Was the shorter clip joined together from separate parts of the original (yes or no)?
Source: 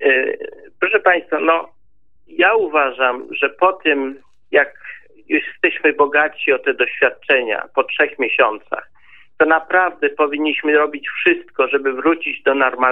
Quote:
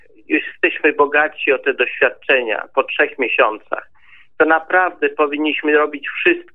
no